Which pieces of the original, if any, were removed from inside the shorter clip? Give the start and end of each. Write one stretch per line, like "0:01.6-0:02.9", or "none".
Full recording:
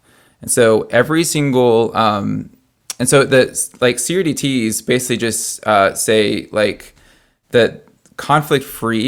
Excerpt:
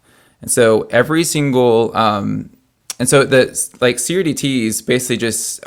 none